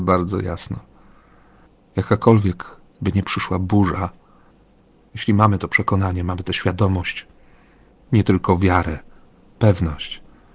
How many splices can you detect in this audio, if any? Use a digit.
1